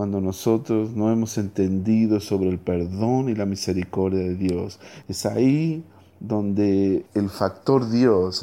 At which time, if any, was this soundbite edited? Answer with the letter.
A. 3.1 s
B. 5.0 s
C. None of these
B